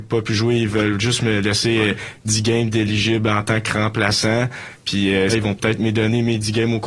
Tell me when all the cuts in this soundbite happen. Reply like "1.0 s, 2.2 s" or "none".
5.3 s